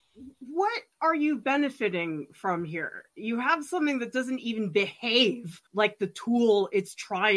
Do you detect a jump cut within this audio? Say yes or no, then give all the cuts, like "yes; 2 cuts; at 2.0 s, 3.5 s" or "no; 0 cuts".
yes; 1 cut; at 5.7 s